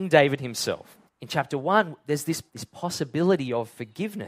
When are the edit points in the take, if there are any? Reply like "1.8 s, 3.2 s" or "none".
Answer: 1.1 s, 2.5 s